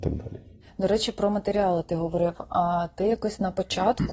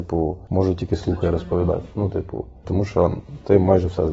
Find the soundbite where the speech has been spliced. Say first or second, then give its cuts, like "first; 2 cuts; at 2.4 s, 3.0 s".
second; 1 cut; at 2.6 s